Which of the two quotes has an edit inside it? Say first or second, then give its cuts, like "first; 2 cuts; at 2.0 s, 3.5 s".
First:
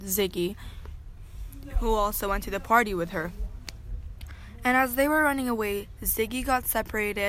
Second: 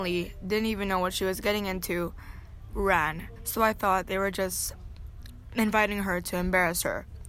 second; 1 cut; at 3.4 s